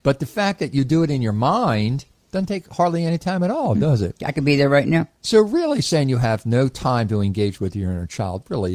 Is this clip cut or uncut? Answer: uncut